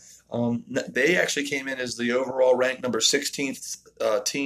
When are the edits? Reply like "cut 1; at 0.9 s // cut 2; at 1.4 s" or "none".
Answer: cut 1; at 0.9 s